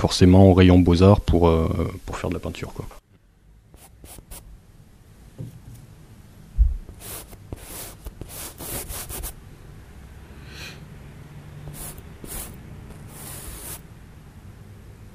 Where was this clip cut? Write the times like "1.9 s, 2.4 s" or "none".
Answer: none